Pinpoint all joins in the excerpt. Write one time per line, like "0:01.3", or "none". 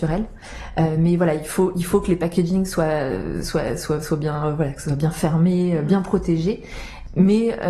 none